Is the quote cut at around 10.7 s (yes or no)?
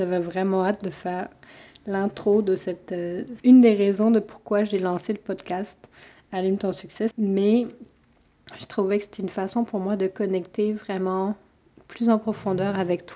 no